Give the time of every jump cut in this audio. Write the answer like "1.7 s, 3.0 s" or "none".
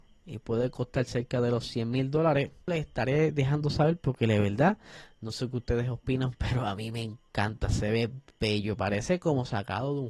2.7 s